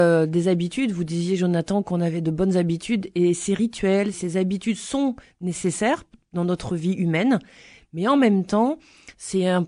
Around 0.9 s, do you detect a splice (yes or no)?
no